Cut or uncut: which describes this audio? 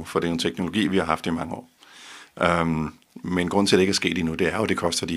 uncut